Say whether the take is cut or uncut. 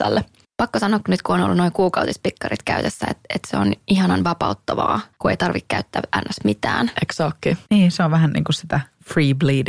cut